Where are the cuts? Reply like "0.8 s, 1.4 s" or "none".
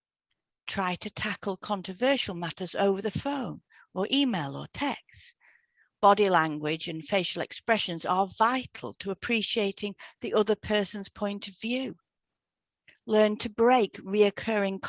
none